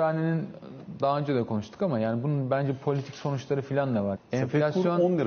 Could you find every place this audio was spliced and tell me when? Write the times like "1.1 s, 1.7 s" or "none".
4.1 s